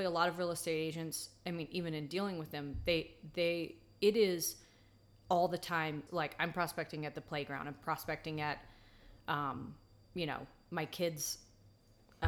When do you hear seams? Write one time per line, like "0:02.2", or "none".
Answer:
0:06.1